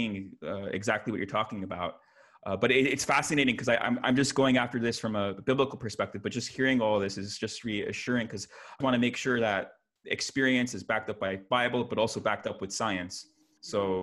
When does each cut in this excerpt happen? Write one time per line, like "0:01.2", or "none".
0:08.8